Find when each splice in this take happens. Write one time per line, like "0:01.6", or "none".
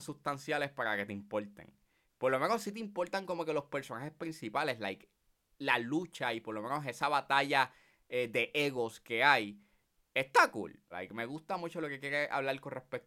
0:10.9